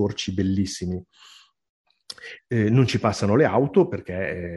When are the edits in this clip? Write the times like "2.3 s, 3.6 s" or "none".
2.4 s